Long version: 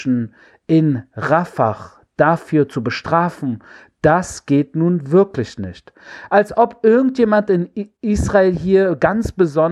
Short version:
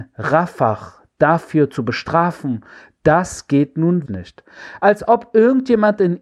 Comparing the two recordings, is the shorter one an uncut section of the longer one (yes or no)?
no